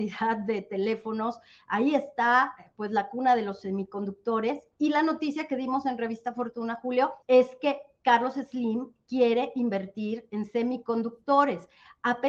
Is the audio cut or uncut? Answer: cut